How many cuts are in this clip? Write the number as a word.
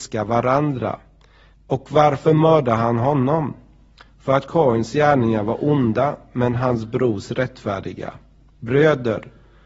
one